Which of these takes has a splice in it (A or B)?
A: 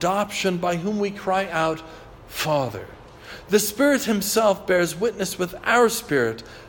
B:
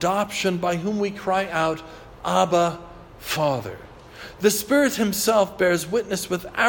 A